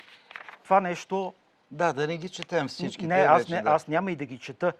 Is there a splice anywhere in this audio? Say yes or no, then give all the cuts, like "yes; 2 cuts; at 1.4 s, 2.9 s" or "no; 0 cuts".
no; 0 cuts